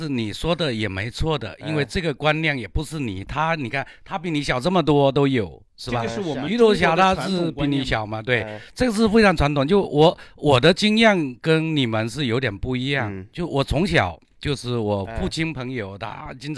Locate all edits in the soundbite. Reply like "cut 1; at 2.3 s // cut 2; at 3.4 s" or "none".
none